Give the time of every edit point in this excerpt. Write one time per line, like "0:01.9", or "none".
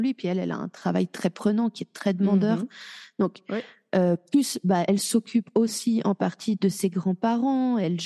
none